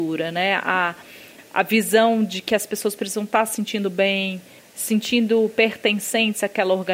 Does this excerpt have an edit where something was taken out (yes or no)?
yes